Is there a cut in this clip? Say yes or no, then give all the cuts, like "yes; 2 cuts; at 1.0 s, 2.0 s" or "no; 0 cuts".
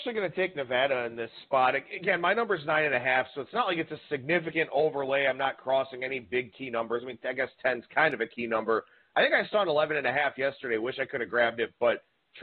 no; 0 cuts